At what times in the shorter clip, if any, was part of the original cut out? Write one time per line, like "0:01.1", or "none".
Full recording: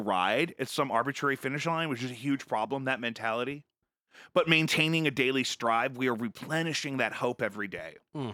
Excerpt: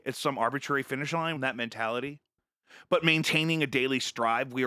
0:01.4